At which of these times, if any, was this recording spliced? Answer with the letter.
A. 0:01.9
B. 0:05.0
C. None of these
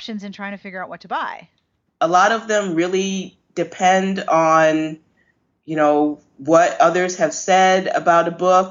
A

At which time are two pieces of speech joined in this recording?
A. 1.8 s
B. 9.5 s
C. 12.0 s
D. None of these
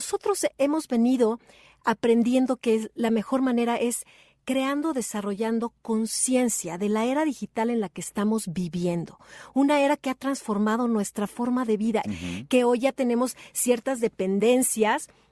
C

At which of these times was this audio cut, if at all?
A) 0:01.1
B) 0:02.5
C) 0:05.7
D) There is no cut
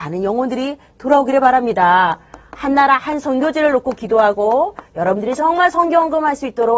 D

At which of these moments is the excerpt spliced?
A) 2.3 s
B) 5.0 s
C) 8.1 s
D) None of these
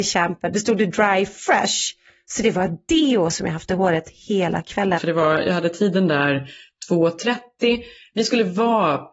B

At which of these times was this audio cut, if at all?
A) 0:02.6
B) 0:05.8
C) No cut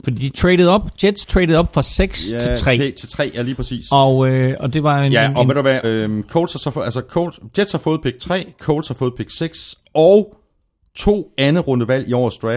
B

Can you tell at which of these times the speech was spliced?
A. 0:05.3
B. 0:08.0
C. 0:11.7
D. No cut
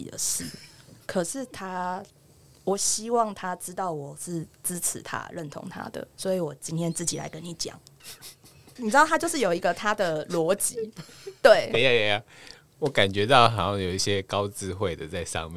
B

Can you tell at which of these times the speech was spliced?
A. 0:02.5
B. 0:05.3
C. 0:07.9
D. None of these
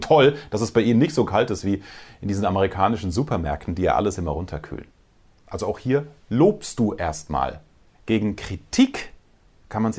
C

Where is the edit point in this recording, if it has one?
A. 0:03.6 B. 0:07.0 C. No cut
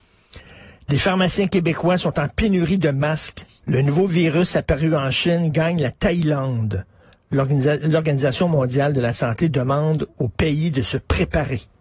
A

